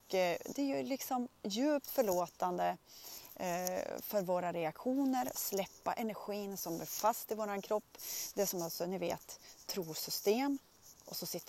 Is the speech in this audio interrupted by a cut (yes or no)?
no